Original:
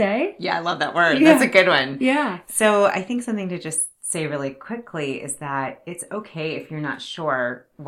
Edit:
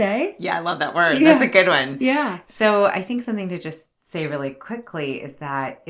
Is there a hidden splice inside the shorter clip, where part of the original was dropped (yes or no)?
no